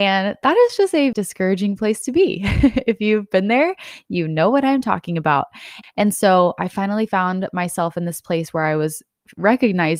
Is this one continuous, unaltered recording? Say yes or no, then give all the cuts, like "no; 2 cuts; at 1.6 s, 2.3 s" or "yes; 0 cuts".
no; 2 cuts; at 1.1 s, 5.8 s